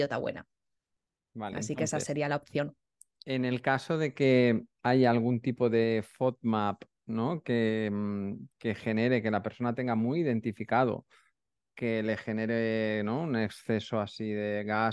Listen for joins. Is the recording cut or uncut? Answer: uncut